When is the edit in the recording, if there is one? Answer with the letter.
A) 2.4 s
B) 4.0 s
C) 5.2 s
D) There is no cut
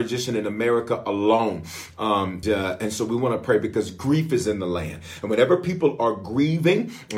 A